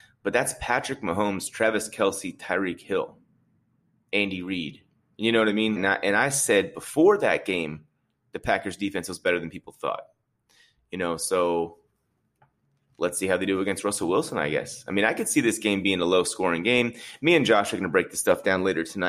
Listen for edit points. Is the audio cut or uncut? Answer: cut